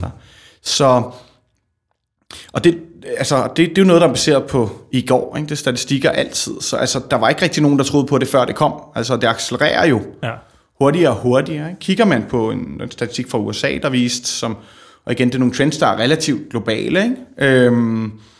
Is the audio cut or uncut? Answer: cut